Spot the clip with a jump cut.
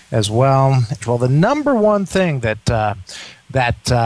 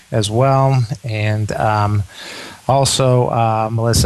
first; 1 cut; at 1.0 s

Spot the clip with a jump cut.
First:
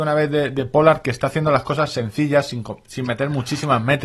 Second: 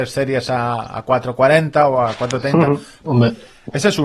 second; 1 cut; at 3.0 s

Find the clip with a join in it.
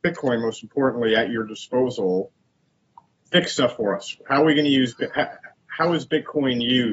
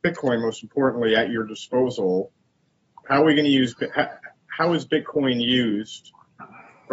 second; 1 cut; at 3.0 s

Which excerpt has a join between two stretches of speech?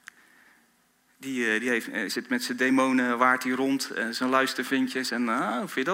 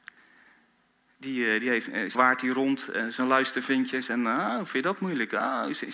second; 1 cut; at 2.1 s

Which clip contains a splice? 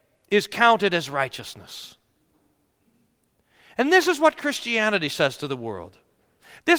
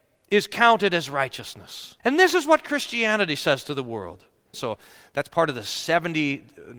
second; 2 cuts; at 2.0 s, 4.5 s

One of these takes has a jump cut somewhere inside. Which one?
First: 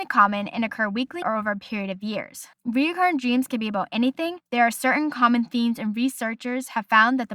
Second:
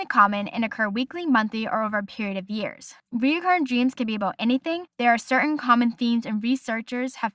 first; 1 cut; at 1.2 s

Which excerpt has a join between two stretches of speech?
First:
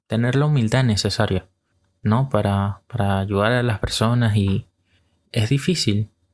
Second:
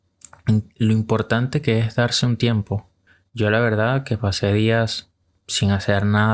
first; 1 cut; at 5.3 s

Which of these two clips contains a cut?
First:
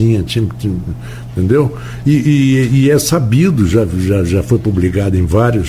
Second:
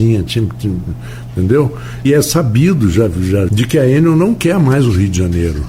second; 2 cuts; at 2.0 s, 3.5 s

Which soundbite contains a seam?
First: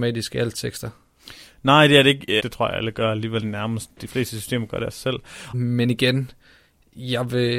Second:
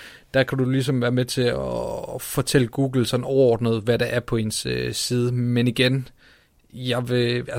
first; 2 cuts; at 2.4 s, 5.5 s

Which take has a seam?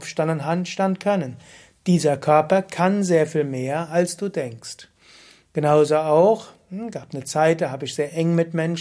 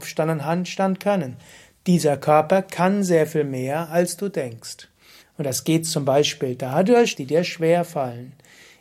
second; 2 cuts; at 5.2 s, 7.1 s

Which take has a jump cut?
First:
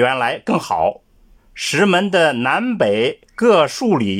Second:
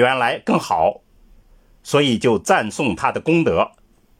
first; 1 cut; at 1.4 s

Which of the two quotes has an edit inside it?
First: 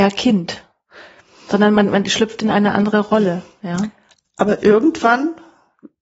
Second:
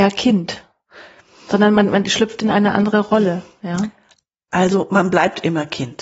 first; 1 cut; at 4.2 s

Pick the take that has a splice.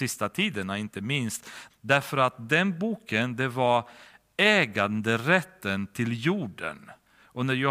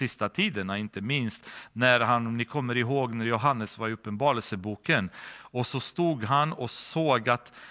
first; 1 cut; at 1.7 s

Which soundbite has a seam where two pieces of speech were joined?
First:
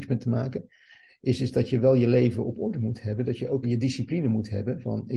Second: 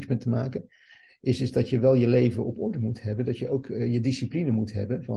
first; 1 cut; at 3.6 s

